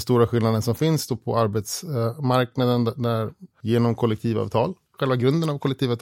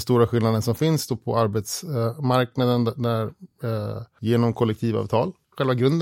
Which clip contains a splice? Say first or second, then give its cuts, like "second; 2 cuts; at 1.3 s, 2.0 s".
first; 1 cut; at 3.5 s